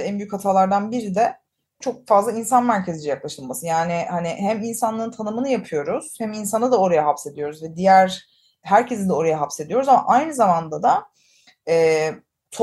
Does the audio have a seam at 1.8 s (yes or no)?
yes